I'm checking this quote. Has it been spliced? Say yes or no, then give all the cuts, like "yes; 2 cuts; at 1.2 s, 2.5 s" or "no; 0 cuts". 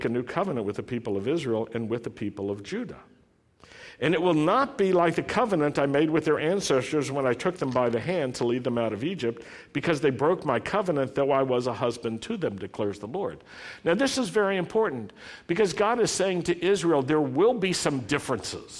no; 0 cuts